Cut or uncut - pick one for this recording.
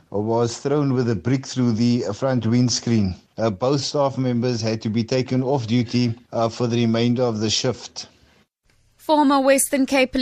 cut